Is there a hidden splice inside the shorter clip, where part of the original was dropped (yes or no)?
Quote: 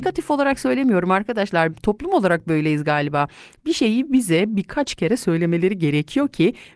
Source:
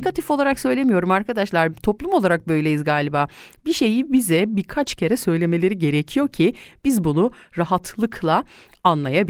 no